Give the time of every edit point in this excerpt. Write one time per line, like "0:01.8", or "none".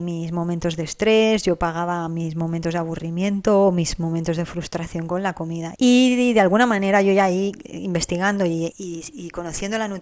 0:05.8
0:08.7